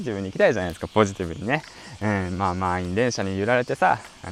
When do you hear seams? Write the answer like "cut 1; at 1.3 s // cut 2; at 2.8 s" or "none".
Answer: none